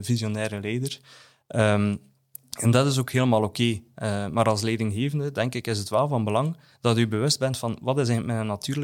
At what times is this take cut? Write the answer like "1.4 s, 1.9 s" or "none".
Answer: none